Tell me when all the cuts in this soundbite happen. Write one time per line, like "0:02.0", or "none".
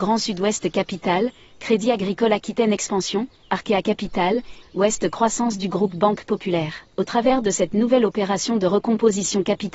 0:01.5
0:04.6
0:06.9